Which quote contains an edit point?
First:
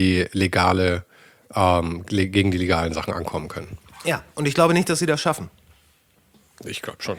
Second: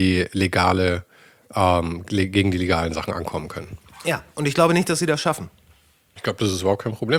second; 1 cut; at 6.2 s

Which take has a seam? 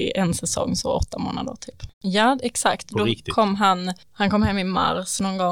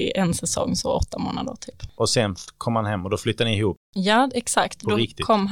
first; 1 cut; at 1.9 s

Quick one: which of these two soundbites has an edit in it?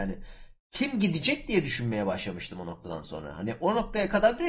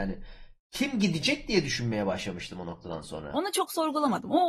second; 1 cut; at 3.3 s

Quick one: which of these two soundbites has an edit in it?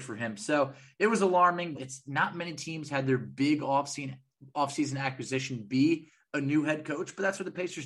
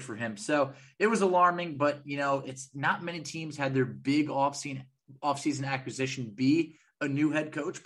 first; 1 cut; at 1.7 s

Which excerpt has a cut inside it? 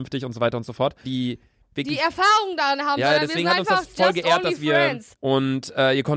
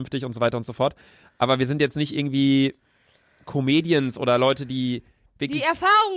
first; 2 cuts; at 1.0 s, 5.1 s

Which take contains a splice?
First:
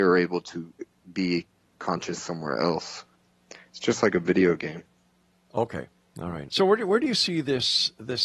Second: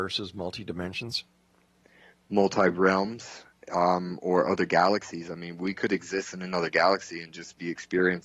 first; 1 cut; at 6.5 s

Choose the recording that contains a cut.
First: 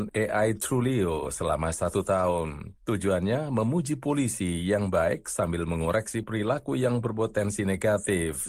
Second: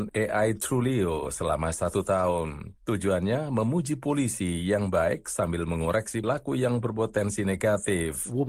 second; 1 cut; at 6.2 s

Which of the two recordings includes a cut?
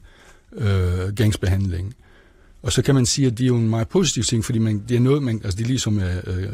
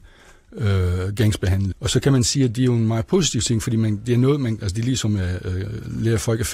second; 1 cut; at 1.7 s

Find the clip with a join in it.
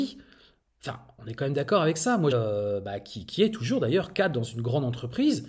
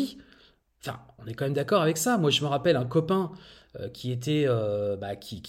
first; 1 cut; at 2.3 s

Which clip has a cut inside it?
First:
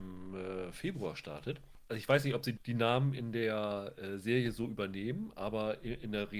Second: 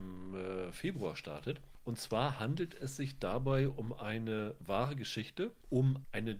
first; 1 cut; at 1.8 s

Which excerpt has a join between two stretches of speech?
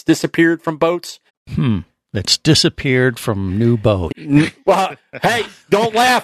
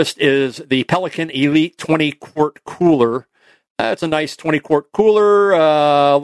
first; 2 cuts; at 1.3 s, 4.1 s

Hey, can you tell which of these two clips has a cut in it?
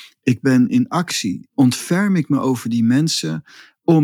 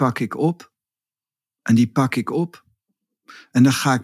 first; 1 cut; at 1.5 s

